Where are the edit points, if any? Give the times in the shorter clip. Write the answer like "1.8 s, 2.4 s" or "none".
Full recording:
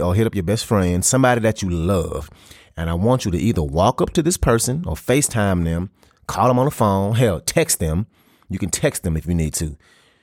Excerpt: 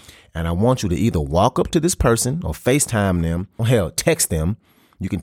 3.6 s